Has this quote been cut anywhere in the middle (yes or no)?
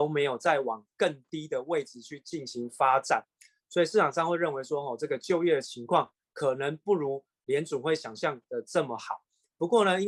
no